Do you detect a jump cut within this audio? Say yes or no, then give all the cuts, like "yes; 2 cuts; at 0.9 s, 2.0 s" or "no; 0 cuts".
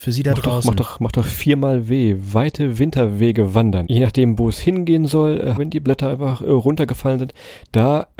yes; 2 cuts; at 3.9 s, 5.6 s